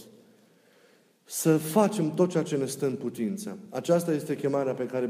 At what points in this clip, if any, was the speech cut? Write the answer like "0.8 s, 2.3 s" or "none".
none